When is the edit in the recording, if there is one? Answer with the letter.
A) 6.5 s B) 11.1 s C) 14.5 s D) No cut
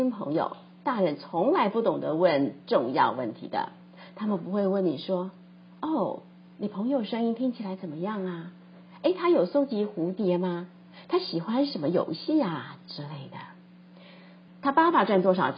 C